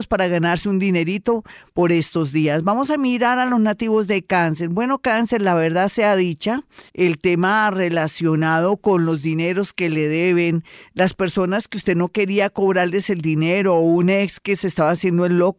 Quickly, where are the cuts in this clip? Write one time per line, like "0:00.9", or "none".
0:06.9